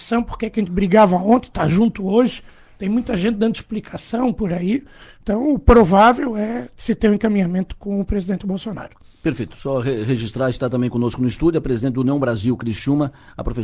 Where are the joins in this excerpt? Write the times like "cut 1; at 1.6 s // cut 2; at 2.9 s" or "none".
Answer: none